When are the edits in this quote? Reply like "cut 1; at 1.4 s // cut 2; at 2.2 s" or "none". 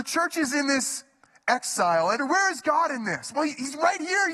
cut 1; at 2.2 s